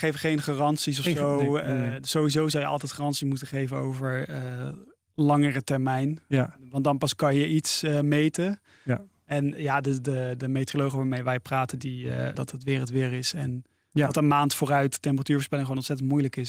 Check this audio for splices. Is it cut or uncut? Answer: cut